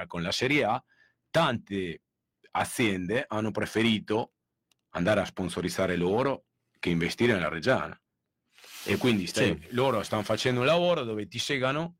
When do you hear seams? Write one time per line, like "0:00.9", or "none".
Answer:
none